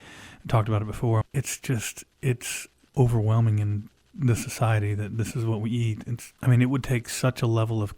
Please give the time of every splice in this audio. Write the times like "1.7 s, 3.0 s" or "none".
1.2 s, 2.8 s, 6.3 s